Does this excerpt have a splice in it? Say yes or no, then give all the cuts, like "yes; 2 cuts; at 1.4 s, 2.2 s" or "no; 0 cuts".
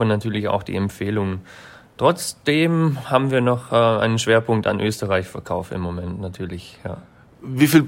no; 0 cuts